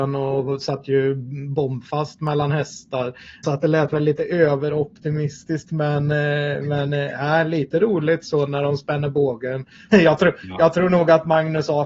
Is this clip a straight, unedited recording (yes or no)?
no